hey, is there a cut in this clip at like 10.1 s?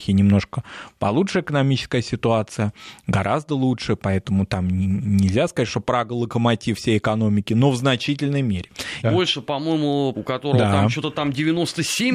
yes; 2 cuts; at 9.0 s, 10.1 s

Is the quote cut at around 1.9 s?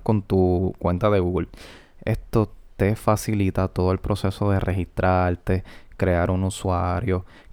yes; 1 cut; at 1.9 s

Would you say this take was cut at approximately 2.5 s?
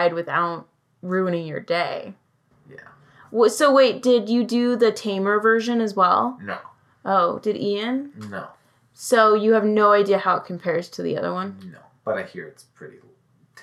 yes; 1 cut; at 2.5 s

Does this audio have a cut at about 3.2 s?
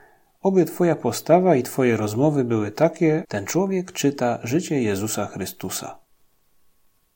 yes; 1 cut; at 3.2 s

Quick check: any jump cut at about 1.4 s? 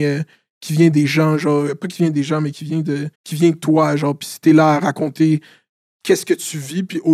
no; 1 cut; at 3.1 s

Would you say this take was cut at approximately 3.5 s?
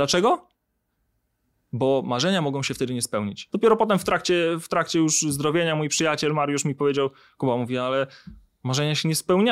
yes; 1 cut; at 3.5 s

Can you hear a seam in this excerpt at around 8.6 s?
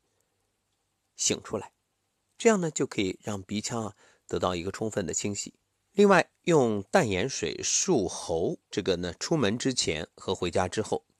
yes; 2 cuts; at 5.7 s, 8.6 s

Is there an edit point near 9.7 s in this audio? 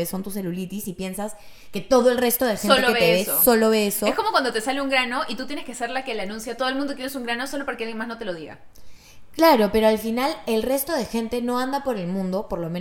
no; 0 cuts

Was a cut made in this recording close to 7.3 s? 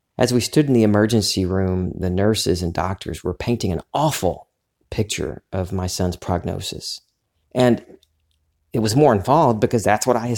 yes; 1 cut; at 7.3 s

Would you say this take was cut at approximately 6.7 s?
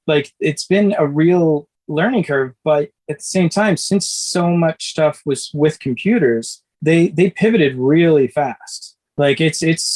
yes; 1 cut; at 6.7 s

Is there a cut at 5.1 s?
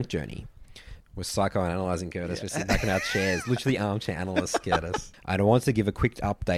yes; 2 cuts; at 1.0 s, 5.1 s

